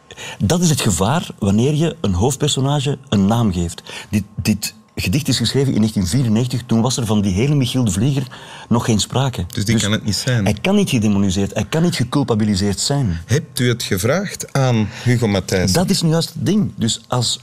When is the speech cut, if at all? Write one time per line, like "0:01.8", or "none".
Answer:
none